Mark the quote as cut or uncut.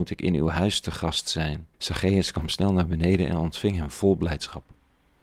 cut